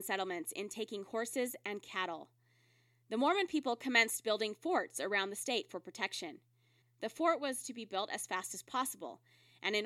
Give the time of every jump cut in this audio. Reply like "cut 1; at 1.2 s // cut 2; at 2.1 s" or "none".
cut 1; at 6.8 s